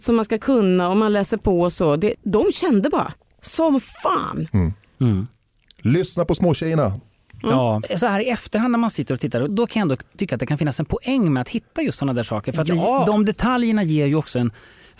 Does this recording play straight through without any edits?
no; 3 cuts; at 2.1 s, 7.8 s, 9.5 s

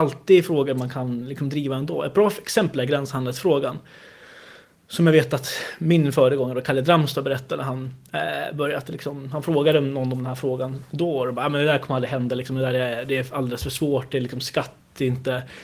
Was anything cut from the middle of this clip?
no; 0 cuts

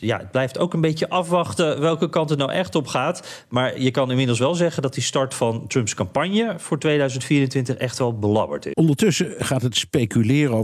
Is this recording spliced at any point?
yes; 1 cut; at 8.7 s

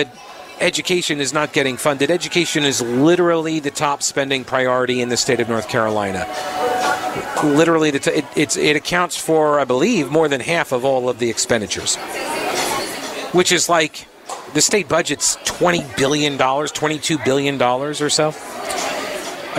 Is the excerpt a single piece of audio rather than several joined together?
yes; 0 cuts

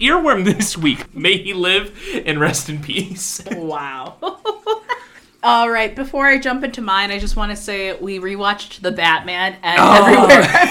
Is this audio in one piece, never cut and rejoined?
no; 1 cut; at 1.1 s

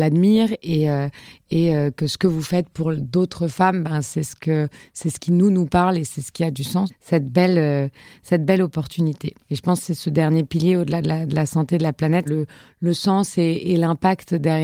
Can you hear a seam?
yes; 3 cuts; at 6.9 s, 9.4 s, 12.3 s

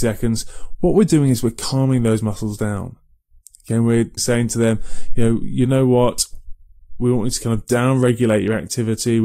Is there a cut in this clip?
yes; 1 cut; at 4.2 s

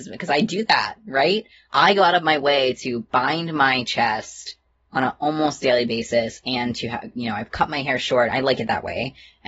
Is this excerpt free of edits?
yes; 0 cuts

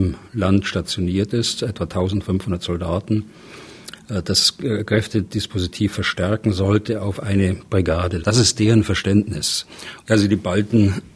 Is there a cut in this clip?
yes; 2 cuts; at 8.2 s, 10.0 s

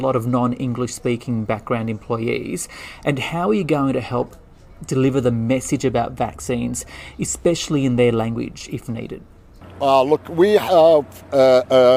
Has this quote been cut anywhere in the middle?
no; 0 cuts

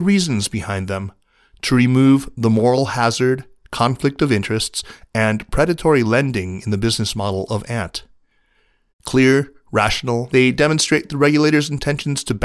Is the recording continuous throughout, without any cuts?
no; 2 cuts; at 8.9 s, 10.3 s

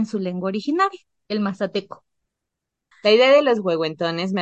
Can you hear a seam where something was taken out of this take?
yes; 1 cut; at 2.9 s

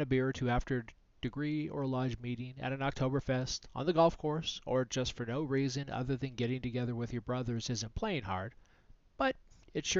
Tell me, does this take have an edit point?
no; 0 cuts

